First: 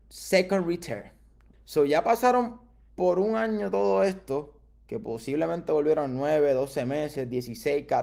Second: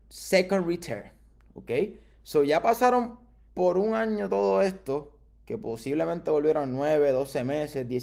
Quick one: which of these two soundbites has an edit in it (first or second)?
first